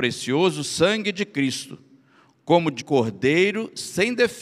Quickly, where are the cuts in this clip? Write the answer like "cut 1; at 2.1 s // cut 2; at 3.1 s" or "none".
cut 1; at 2.8 s